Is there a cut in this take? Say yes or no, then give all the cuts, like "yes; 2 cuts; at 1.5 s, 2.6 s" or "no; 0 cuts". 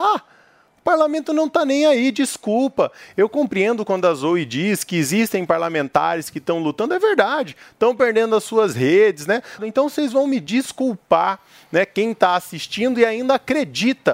yes; 1 cut; at 9.6 s